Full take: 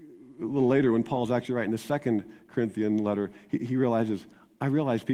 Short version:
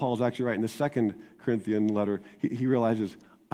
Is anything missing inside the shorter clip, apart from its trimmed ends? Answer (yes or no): no